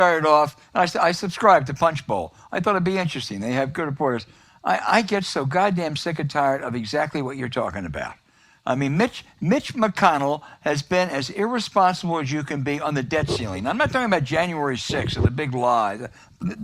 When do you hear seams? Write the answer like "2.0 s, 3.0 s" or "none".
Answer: none